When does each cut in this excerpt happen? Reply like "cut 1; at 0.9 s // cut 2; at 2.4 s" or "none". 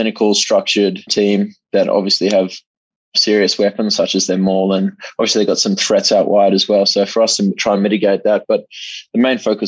cut 1; at 1.1 s

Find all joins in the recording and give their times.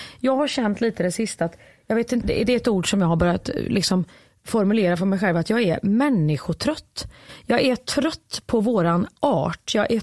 cut 1; at 2.2 s

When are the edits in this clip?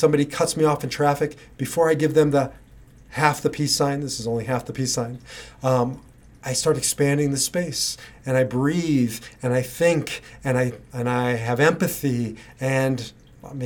none

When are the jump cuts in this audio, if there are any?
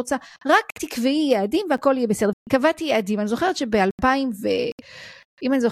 cut 1; at 2.3 s

